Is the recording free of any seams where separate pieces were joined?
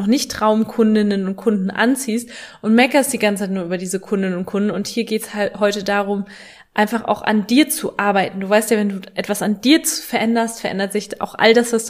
yes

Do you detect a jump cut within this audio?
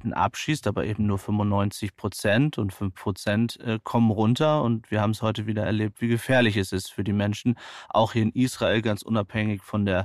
no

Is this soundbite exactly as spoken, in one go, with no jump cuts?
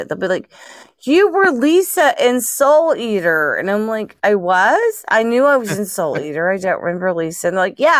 yes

